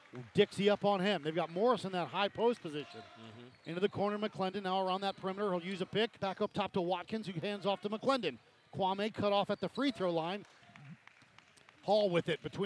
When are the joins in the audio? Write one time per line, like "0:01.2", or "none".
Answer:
0:06.2
0:10.6